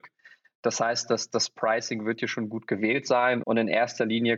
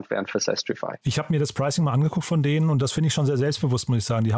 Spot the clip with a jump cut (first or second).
first